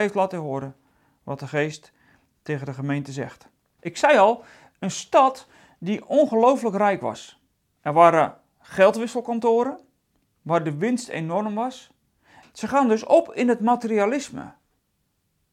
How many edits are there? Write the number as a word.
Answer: two